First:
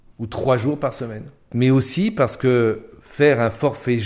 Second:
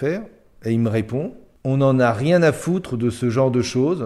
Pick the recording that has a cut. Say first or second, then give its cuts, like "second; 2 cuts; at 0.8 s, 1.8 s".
first; 1 cut; at 1.5 s